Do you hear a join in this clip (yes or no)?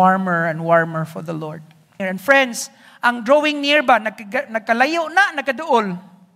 yes